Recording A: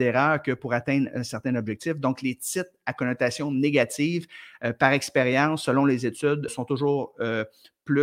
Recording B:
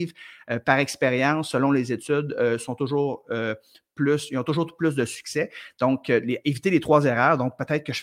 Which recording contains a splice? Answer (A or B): A